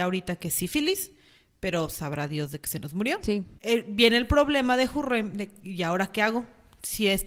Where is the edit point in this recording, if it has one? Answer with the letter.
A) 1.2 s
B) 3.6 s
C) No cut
B